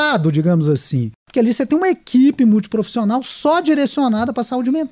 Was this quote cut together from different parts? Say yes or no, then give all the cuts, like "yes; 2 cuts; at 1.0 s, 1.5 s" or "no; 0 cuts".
no; 0 cuts